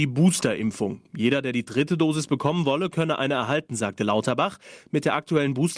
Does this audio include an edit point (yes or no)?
no